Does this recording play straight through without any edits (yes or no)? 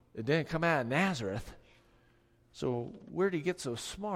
yes